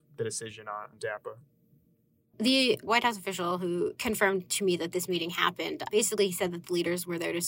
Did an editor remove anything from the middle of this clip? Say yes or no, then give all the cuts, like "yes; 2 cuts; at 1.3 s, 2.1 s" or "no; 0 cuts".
no; 0 cuts